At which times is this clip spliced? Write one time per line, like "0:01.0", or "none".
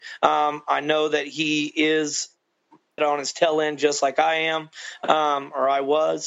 0:03.0